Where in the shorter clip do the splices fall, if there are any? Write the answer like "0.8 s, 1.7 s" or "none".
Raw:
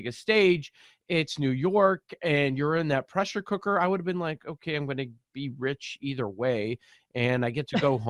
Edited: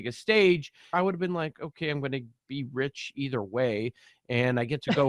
0.9 s